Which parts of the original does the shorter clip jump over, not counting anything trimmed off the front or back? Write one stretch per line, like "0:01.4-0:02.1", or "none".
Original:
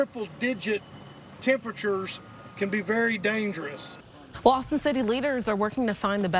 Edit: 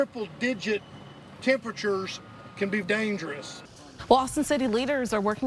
0:02.8-0:03.2